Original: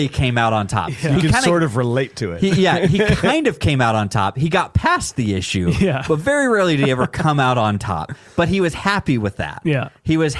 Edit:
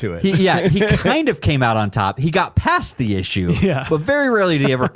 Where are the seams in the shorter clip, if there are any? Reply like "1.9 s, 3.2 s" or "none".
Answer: none